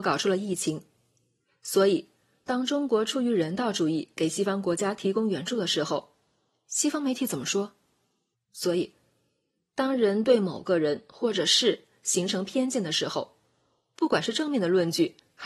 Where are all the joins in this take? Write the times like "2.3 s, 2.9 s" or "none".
8.3 s